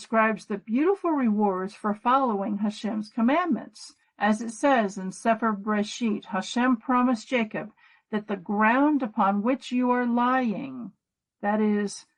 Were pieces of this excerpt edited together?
yes; 1 cut; at 4.0 s

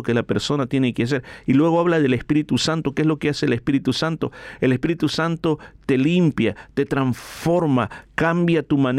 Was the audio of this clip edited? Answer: no; 0 cuts

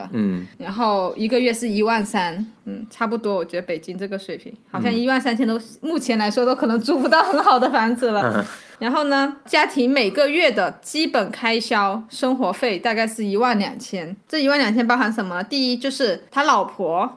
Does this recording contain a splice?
no; 0 cuts

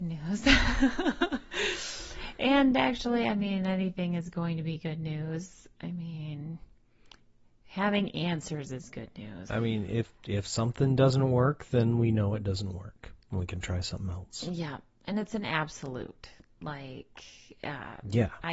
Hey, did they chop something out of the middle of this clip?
yes; 1 cut; at 9.5 s

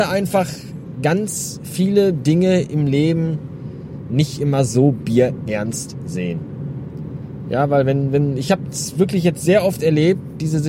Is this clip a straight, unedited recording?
yes; 0 cuts

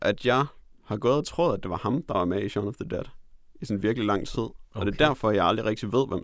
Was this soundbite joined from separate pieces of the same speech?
no; 0 cuts

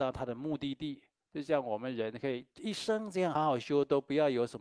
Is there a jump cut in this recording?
yes; 1 cut; at 3.4 s

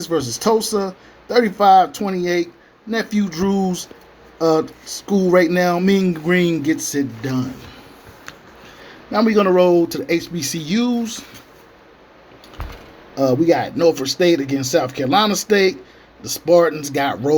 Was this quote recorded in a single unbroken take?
yes; 0 cuts

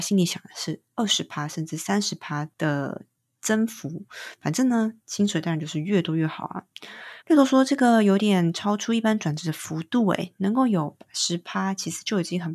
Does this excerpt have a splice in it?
yes; 2 cuts; at 2.5 s, 7.2 s

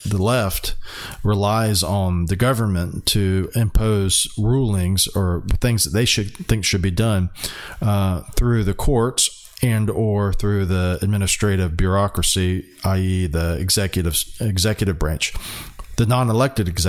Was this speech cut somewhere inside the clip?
no; 0 cuts

